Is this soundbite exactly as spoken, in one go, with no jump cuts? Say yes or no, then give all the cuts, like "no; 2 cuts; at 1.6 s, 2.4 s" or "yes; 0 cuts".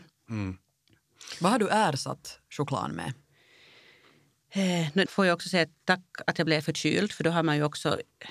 no; 1 cut; at 5.1 s